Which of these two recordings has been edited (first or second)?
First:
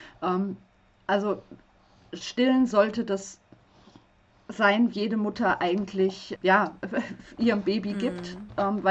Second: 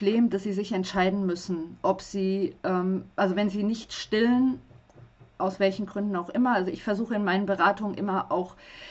first